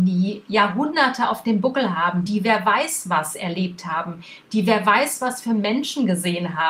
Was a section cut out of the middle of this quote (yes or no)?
no